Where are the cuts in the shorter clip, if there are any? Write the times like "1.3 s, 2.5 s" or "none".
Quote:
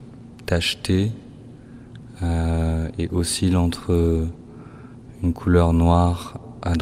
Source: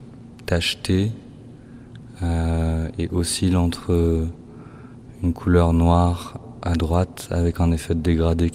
none